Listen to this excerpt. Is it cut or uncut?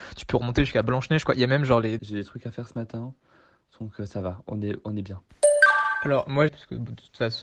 cut